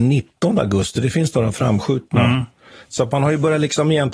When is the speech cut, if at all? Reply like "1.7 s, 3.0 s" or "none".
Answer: none